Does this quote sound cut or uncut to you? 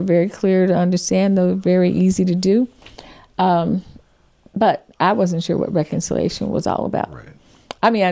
uncut